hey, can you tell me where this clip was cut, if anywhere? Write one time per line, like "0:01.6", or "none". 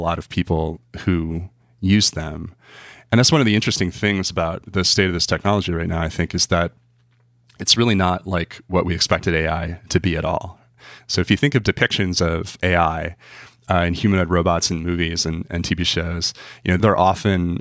none